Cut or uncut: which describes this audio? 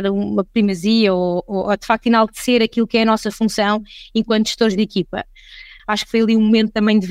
cut